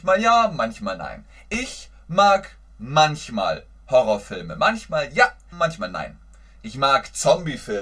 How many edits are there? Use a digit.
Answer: 1